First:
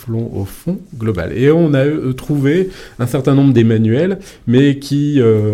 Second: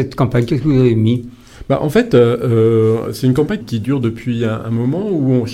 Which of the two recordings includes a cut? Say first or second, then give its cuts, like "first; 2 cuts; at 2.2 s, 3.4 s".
second; 1 cut; at 3.6 s